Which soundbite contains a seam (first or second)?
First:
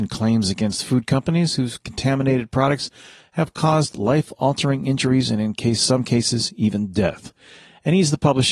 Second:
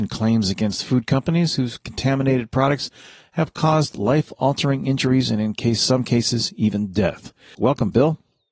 second